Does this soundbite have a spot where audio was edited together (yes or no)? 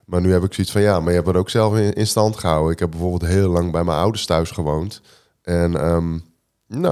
no